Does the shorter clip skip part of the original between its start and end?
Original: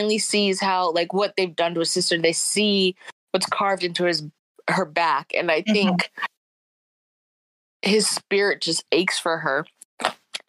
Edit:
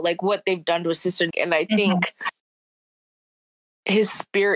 yes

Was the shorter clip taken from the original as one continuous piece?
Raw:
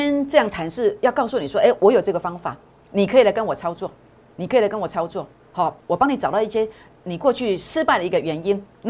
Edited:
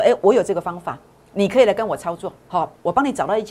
no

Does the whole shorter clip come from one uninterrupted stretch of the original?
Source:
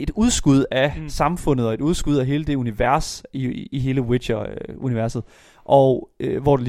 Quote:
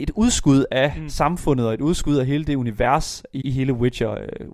no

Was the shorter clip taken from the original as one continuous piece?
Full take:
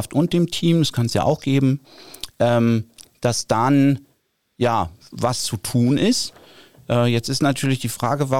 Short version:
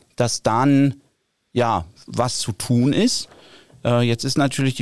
yes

